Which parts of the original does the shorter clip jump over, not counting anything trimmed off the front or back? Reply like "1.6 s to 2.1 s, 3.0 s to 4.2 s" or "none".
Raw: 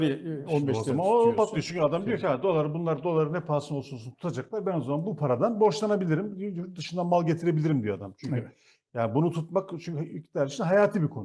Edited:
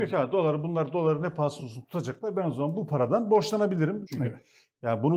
3.7 s to 3.9 s, 6.3 s to 8.2 s